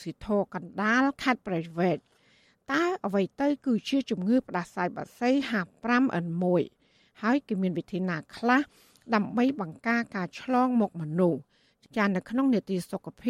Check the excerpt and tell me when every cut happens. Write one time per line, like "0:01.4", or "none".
none